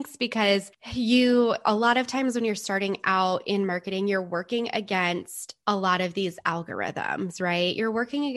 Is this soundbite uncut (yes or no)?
yes